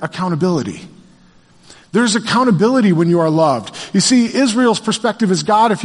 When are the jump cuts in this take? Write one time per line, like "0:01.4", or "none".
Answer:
none